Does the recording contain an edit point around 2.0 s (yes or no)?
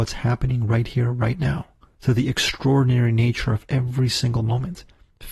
yes